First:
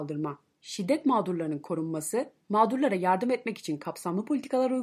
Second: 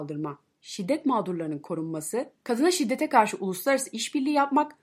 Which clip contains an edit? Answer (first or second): second